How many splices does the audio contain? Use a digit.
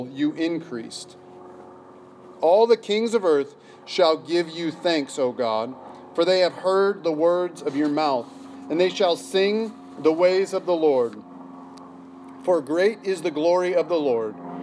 0